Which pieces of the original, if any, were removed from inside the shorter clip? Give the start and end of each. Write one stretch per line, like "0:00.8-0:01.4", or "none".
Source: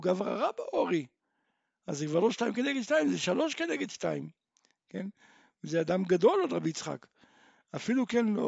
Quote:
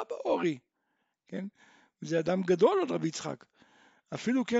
0:01.6-0:04.7